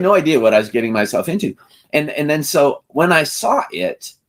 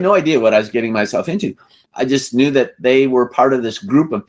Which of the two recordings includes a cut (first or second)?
second